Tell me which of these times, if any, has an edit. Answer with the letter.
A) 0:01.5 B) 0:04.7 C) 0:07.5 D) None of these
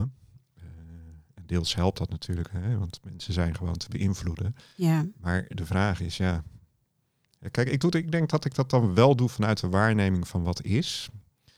D